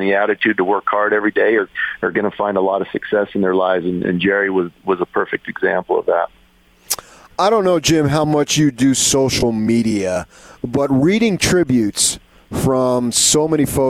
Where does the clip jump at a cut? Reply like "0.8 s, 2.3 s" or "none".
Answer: none